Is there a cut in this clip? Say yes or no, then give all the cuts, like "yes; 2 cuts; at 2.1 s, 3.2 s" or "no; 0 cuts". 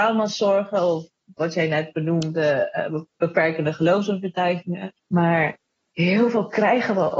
yes; 1 cut; at 5.0 s